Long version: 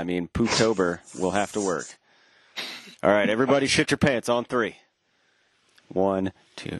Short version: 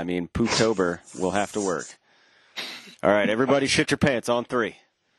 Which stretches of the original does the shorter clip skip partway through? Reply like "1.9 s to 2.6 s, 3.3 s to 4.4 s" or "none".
none